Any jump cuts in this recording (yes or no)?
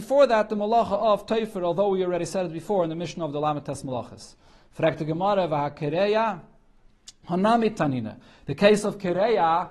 no